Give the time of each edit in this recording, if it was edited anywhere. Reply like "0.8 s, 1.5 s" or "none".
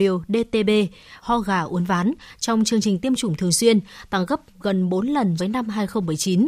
1.2 s, 5.4 s